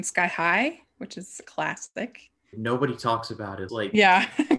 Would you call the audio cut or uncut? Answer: cut